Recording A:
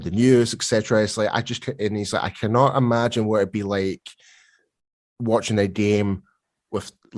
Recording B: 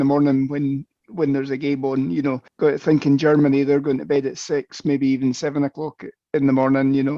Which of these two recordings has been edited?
B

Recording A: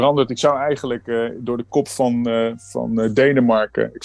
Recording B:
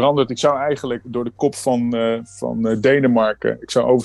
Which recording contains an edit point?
B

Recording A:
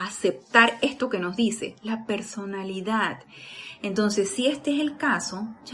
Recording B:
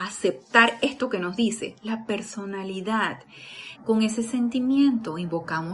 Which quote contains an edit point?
B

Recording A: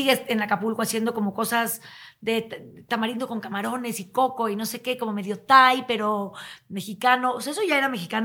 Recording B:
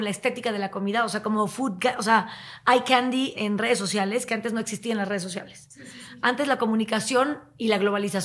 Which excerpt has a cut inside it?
B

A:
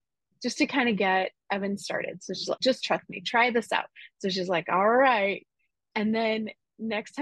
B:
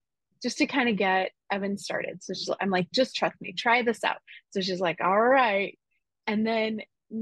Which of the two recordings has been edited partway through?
A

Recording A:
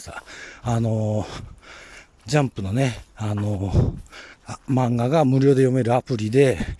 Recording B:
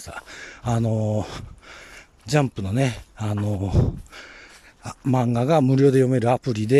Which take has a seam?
A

